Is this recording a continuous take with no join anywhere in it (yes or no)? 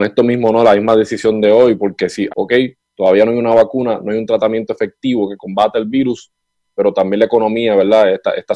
no